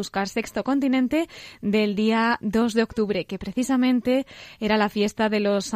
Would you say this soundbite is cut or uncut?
uncut